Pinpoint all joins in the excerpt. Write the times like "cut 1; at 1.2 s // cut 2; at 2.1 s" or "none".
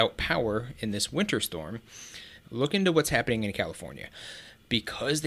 cut 1; at 2.4 s